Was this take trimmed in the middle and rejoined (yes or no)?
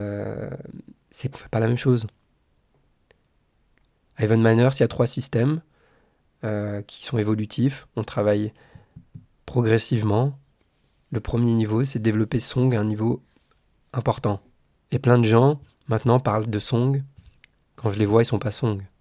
yes